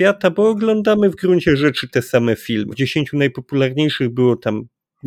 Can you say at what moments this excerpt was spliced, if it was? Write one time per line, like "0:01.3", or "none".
0:02.7